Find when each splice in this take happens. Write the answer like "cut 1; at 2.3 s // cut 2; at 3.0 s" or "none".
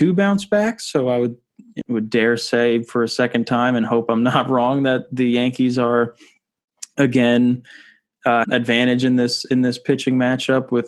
cut 1; at 1.8 s // cut 2; at 8.4 s